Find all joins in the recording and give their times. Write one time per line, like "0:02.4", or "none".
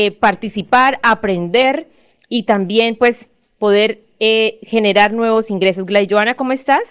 none